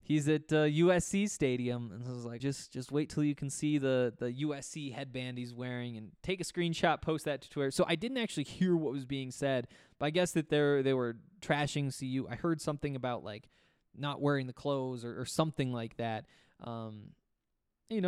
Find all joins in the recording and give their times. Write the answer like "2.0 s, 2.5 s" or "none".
2.4 s